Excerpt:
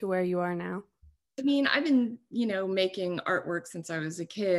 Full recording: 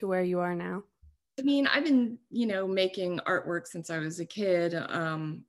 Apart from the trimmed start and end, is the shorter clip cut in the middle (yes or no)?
no